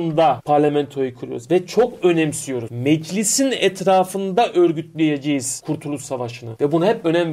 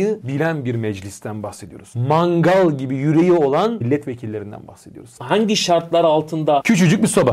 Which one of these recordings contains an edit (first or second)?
second